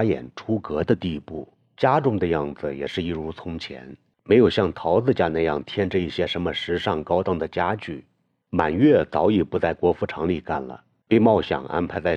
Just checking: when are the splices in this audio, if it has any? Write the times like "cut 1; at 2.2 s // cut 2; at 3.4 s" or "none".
none